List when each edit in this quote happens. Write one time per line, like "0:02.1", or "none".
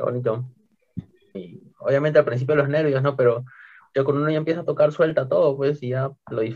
0:01.3